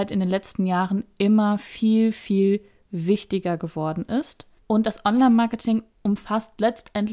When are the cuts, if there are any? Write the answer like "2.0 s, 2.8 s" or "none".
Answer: 4.6 s